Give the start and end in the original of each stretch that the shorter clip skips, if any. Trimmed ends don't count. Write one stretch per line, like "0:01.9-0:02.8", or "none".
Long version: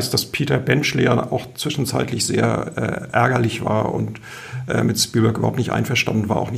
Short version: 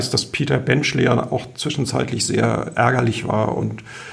0:02.7-0:03.1

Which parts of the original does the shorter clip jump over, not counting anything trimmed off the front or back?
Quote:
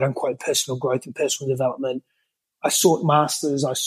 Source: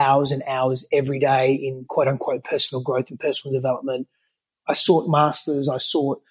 none

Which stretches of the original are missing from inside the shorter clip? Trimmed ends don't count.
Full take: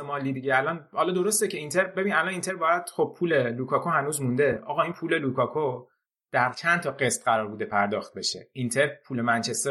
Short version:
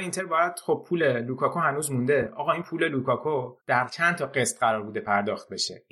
0:05.9-0:06.2

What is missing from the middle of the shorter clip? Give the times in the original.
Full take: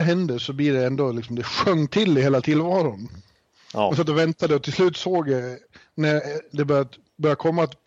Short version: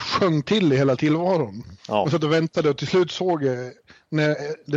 0:03.2-0:03.6

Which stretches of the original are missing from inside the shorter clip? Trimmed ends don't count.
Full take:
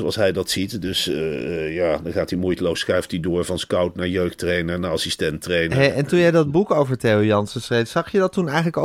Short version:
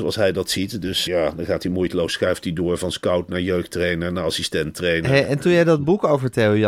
0:01.1-0:01.7

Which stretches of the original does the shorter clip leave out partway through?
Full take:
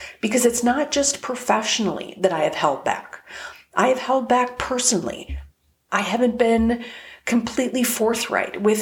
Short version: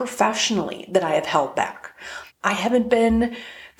0:03.6-0:05.8

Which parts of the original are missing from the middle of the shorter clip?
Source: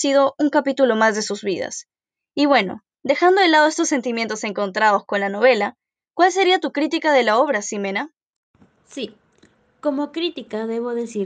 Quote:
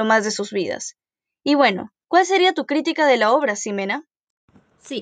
0:03.0-0:06.1

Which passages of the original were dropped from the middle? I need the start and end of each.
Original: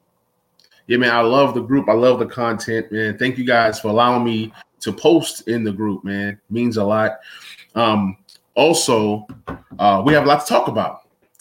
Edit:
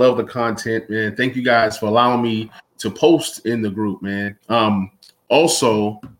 0:06.4-0:07.7

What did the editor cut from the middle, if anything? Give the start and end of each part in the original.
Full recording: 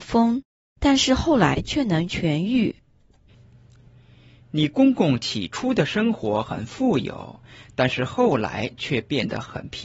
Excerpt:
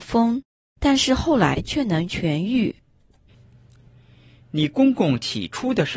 none

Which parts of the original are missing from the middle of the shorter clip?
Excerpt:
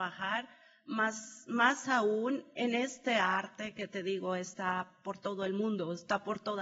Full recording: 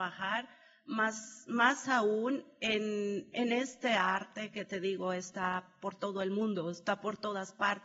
0:02.5-0:03.3

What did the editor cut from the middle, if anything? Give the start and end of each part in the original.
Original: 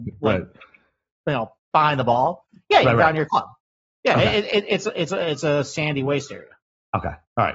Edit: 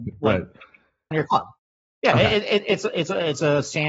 0:01.1-0:03.1

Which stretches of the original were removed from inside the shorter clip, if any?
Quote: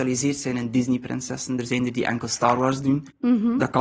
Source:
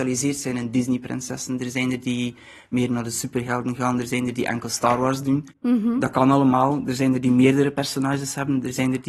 0:01.6-0:04.0

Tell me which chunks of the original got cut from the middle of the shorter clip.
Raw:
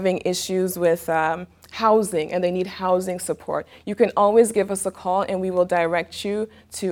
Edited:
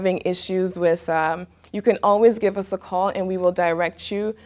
0:01.7-0:03.8

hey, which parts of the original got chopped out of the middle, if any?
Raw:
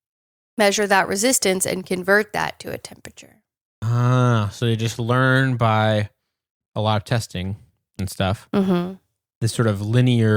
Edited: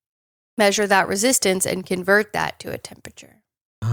none

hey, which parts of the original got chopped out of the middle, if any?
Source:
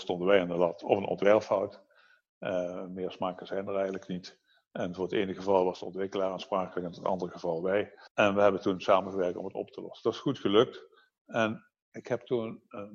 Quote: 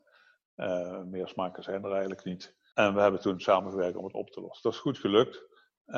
0:04.6-0:08.1

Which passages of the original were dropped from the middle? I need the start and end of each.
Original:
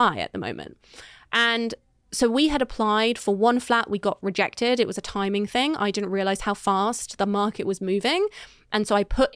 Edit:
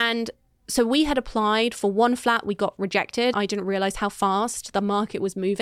0:04.8-0:05.8

